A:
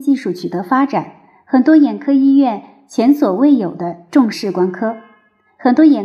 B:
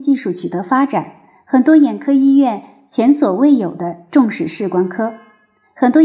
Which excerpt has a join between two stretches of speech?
A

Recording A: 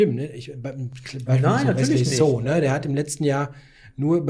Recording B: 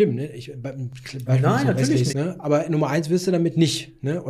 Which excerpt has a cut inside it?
B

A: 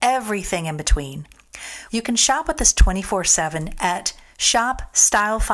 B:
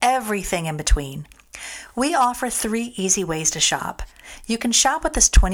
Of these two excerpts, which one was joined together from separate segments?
A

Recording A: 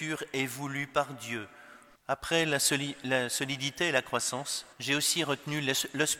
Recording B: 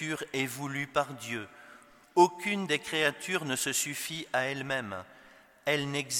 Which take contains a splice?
A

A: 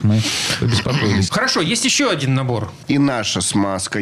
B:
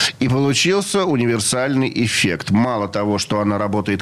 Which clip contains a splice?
A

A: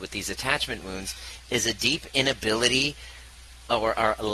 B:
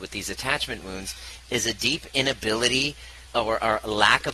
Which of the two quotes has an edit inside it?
B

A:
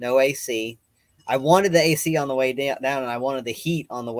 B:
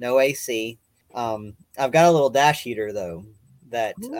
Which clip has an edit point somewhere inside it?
B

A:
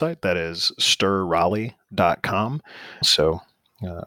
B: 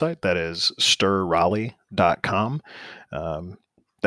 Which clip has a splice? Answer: A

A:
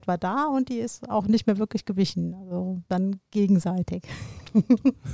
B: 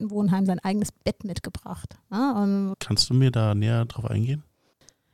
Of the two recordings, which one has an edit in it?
B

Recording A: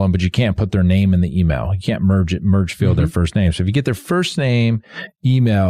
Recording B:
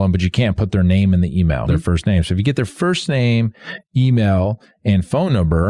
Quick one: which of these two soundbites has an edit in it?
B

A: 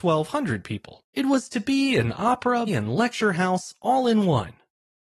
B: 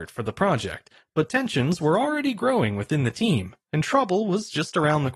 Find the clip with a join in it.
A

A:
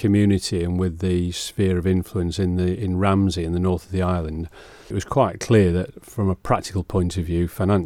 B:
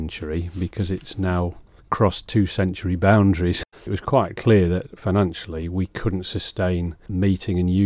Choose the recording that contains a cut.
B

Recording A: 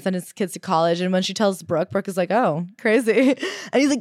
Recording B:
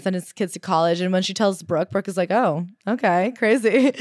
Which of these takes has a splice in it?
A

